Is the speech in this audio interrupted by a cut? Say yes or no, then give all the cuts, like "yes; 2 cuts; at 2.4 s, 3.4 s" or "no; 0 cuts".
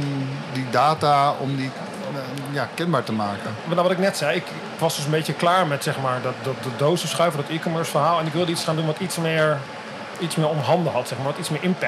no; 0 cuts